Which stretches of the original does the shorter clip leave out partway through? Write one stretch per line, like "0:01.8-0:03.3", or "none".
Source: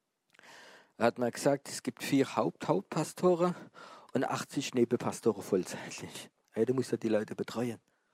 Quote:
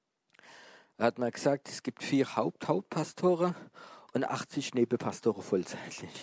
none